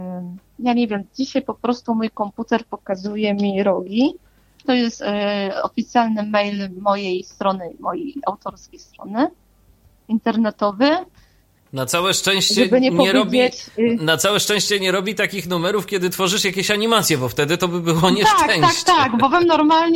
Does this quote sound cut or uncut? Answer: cut